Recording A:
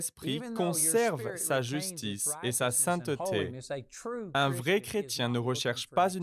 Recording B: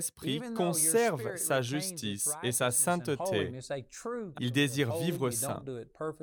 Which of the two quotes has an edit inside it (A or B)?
B